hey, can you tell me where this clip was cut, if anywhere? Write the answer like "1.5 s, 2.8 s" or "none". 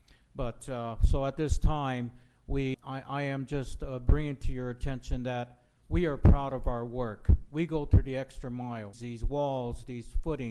2.7 s, 8.9 s